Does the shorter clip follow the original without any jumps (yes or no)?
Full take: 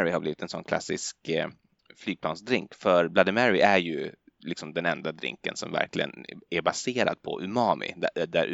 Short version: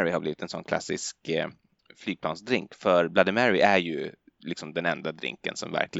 yes